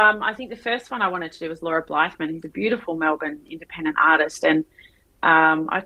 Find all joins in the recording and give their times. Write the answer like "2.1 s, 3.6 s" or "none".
none